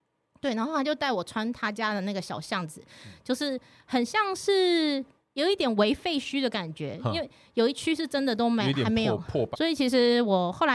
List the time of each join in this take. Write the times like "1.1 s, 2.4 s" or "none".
9.5 s